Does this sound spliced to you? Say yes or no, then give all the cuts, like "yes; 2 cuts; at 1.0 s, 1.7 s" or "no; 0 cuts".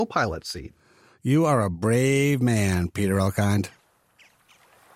no; 0 cuts